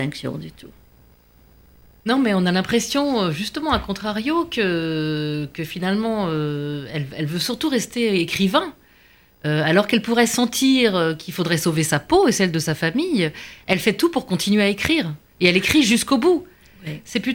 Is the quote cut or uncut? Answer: uncut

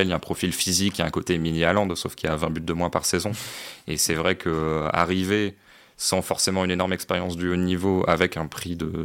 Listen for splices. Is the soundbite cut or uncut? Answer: uncut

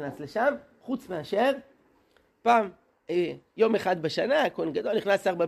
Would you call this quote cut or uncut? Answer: uncut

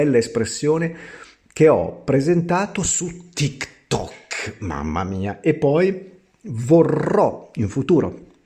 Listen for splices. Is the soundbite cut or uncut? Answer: uncut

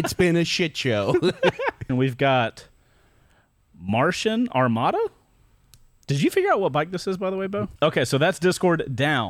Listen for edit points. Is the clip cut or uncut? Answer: cut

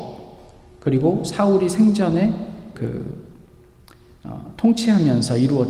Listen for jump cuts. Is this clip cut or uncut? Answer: cut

